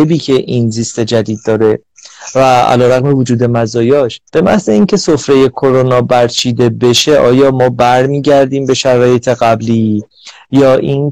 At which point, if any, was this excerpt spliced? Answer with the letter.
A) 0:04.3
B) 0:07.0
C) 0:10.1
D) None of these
A